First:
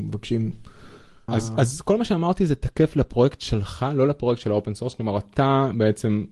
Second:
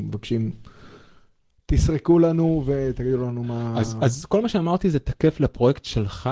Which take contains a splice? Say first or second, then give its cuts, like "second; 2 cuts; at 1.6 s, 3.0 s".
first; 1 cut; at 1.3 s